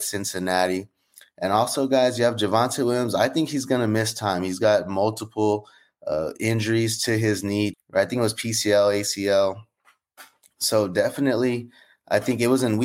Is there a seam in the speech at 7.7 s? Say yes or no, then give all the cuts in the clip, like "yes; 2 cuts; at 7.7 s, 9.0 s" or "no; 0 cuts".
yes; 1 cut; at 7.7 s